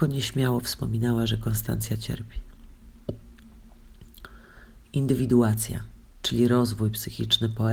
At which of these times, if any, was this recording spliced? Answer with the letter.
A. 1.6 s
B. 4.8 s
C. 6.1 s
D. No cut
D